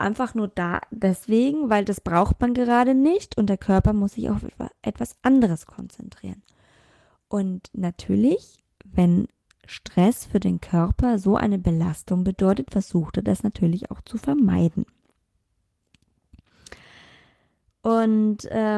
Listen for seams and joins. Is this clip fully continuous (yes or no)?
yes